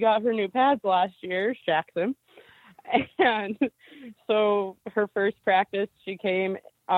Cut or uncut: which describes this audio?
cut